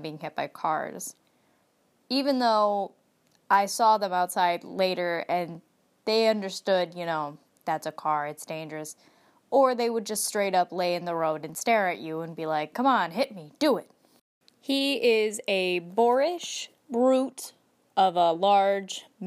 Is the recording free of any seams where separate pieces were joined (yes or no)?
no